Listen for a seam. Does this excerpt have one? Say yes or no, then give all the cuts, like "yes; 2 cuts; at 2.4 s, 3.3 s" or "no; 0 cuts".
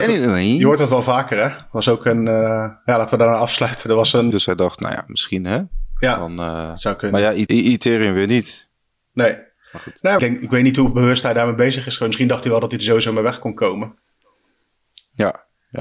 yes; 3 cuts; at 4.3 s, 7.5 s, 10.2 s